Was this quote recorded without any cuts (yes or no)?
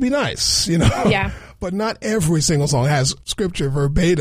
no